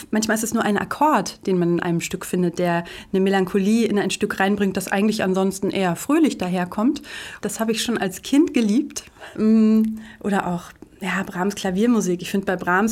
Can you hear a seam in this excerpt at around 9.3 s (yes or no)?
yes